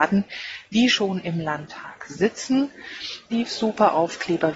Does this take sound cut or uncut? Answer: cut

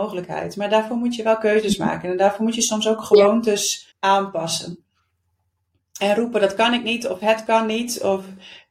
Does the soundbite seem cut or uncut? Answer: cut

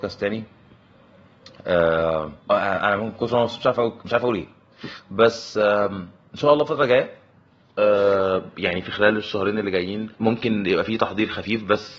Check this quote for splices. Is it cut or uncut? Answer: cut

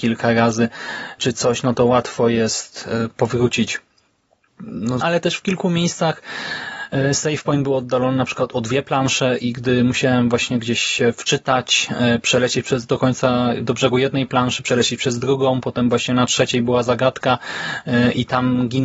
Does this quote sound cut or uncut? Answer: cut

